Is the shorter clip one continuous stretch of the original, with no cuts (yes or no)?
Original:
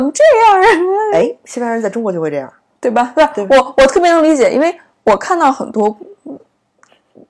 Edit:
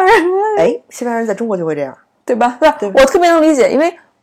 no